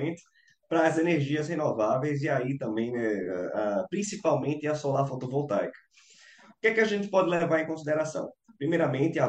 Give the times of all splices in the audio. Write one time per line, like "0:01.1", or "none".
none